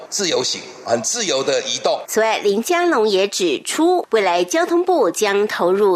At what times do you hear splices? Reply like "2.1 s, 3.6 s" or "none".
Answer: 2.0 s